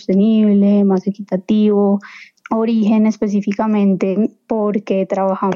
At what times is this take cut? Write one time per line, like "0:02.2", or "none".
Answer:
0:02.3